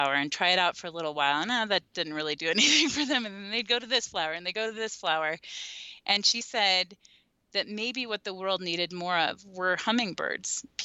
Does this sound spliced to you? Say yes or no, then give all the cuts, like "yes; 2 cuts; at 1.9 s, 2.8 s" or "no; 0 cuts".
no; 0 cuts